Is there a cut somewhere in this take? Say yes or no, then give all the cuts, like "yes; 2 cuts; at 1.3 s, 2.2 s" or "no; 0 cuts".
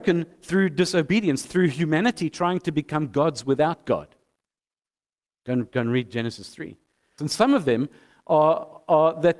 yes; 2 cuts; at 1.4 s, 7.2 s